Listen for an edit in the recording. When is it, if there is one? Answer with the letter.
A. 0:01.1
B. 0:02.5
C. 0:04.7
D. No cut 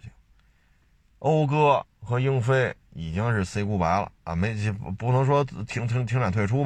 D